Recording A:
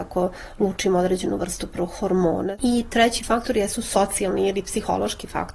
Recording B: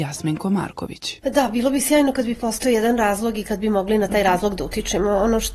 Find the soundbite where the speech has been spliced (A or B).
B